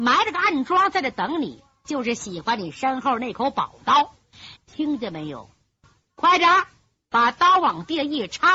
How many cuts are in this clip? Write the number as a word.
one